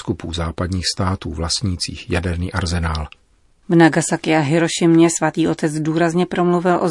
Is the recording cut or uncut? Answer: cut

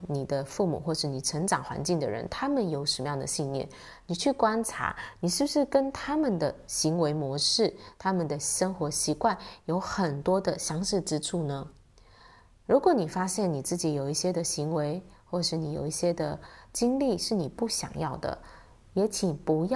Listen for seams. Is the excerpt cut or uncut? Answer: uncut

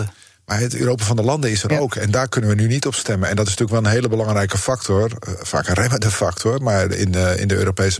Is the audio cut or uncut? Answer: uncut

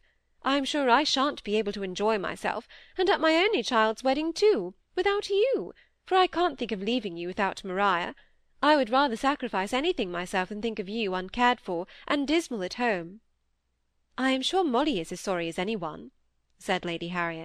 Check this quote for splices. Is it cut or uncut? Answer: uncut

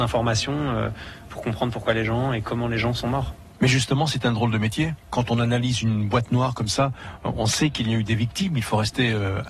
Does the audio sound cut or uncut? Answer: uncut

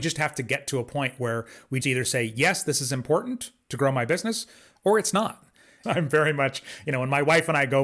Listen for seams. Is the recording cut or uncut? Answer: cut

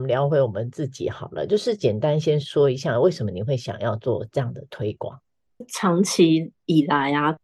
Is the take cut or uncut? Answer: cut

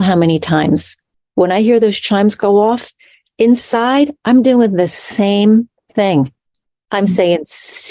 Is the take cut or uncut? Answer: uncut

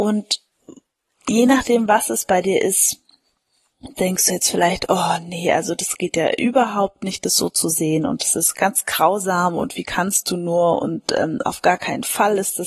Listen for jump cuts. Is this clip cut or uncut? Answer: cut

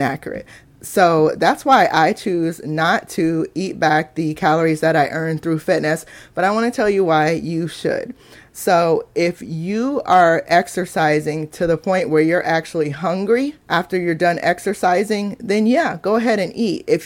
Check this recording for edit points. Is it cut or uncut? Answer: cut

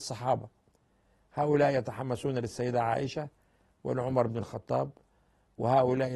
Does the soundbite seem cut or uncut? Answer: uncut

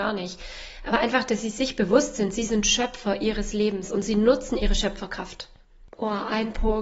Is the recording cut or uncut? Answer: uncut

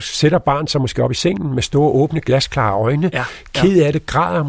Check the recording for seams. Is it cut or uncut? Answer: uncut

